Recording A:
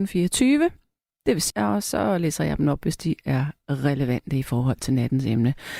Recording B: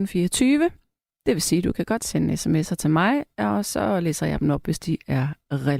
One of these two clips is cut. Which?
A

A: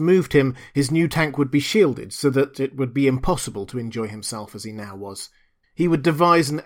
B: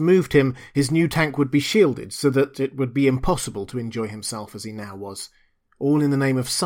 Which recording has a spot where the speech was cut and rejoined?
A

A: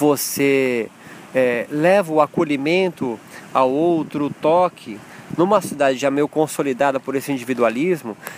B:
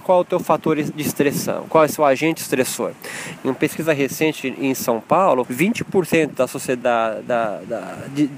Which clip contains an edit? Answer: B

